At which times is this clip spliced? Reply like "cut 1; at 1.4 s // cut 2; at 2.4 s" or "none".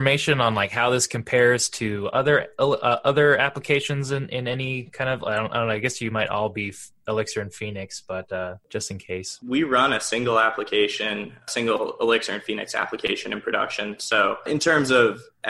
none